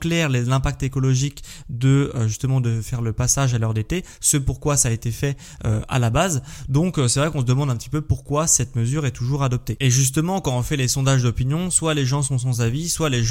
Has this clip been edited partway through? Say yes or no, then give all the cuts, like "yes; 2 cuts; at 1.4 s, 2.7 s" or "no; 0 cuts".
no; 0 cuts